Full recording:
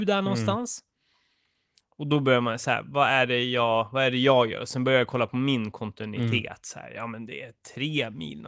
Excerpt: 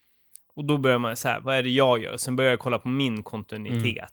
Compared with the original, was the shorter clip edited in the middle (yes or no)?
yes